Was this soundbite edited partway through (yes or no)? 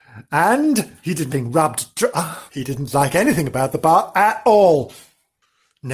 yes